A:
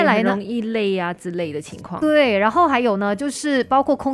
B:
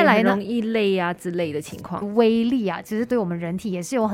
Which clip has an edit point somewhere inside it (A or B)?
B